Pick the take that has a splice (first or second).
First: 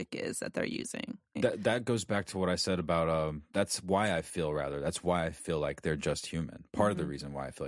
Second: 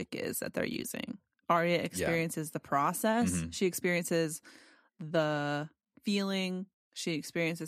first